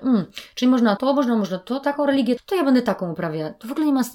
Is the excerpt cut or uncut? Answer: cut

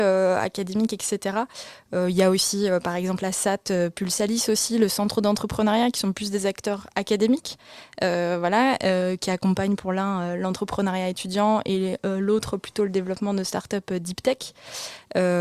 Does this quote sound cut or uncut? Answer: uncut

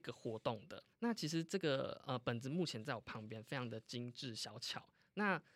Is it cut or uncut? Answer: cut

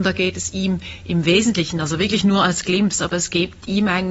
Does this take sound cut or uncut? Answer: uncut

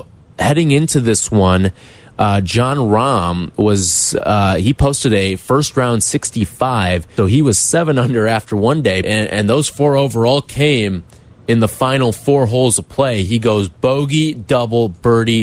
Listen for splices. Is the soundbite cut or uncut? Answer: cut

